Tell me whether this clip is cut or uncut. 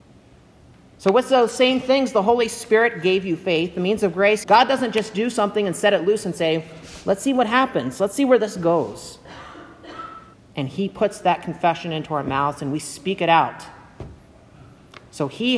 cut